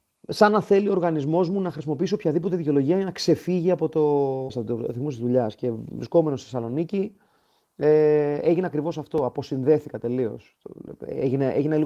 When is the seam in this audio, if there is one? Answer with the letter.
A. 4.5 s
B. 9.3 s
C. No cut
A